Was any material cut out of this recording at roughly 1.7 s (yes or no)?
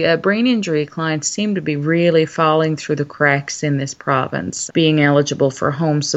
no